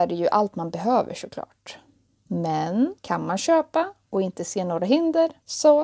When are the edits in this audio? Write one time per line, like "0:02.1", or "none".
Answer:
none